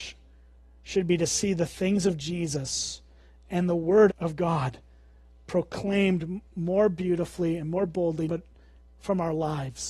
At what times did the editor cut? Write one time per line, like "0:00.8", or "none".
0:04.1
0:08.3